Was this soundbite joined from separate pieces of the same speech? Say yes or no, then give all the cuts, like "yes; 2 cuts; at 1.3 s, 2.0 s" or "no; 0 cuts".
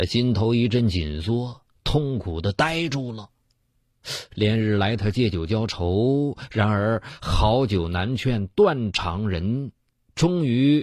yes; 1 cut; at 4.3 s